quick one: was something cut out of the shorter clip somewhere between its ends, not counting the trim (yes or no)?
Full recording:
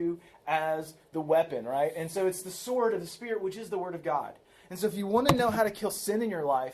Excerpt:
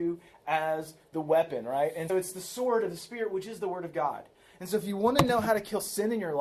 yes